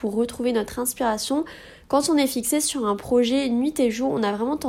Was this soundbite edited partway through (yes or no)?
no